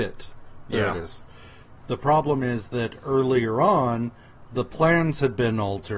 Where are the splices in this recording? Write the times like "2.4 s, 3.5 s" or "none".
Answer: 1.8 s